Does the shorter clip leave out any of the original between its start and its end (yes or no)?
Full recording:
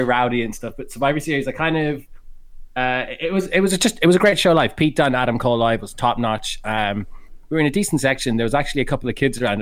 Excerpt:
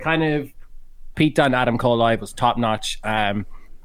yes